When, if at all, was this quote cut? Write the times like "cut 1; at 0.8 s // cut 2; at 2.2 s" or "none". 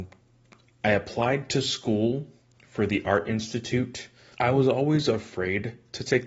cut 1; at 4.3 s